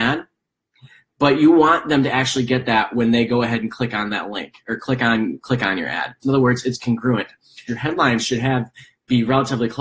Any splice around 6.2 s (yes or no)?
yes